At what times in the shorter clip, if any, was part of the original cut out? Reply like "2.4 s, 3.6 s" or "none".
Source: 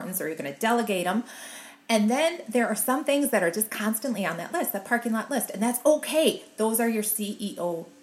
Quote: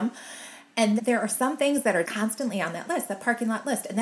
1.0 s, 2.0 s